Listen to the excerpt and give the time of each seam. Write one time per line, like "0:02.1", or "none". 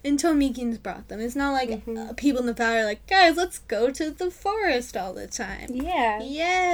none